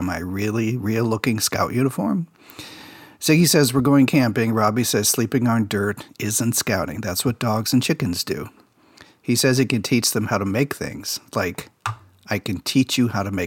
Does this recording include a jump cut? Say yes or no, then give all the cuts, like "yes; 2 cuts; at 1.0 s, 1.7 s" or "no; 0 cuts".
no; 0 cuts